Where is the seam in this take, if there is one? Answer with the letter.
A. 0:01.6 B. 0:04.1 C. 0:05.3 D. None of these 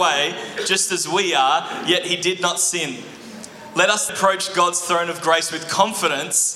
B